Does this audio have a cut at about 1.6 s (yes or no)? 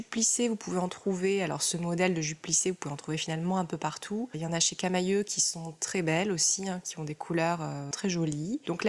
no